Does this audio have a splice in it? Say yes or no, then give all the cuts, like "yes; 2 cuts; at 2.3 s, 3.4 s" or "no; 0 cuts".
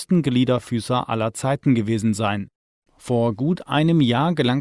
yes; 1 cut; at 2.9 s